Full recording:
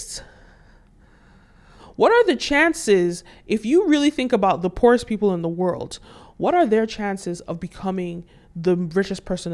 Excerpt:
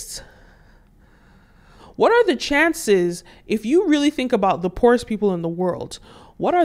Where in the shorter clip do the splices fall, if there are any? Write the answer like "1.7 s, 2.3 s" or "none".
none